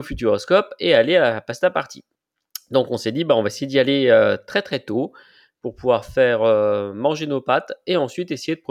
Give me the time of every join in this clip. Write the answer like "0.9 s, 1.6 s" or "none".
none